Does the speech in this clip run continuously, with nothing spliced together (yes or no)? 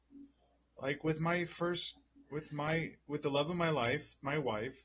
yes